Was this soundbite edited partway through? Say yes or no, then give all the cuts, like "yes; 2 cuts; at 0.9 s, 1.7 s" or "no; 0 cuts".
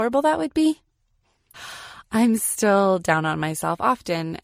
yes; 1 cut; at 1.5 s